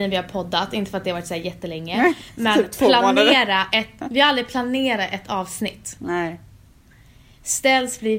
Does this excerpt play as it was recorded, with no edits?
yes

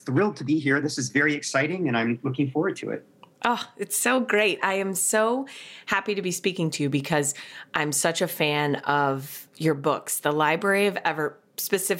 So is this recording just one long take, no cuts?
yes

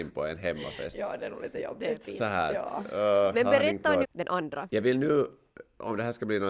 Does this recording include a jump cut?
yes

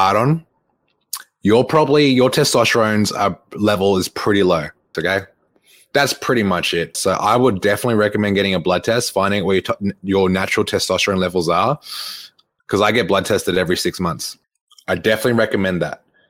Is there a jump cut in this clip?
yes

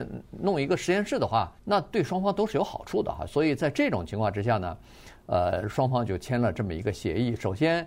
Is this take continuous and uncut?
no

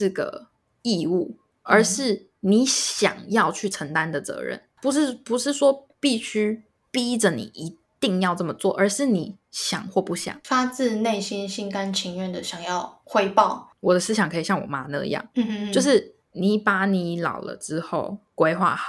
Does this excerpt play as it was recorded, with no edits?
no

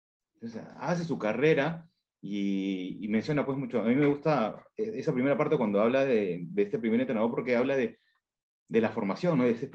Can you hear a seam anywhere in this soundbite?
no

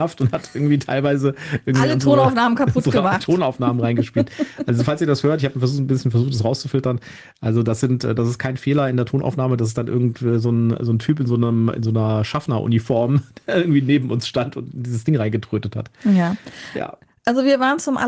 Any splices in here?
no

